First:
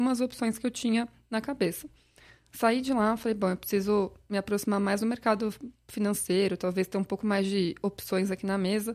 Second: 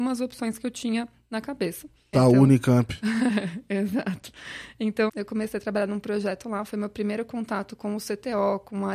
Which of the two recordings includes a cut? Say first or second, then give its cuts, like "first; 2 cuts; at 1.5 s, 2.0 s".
second; 2 cuts; at 2.1 s, 5.1 s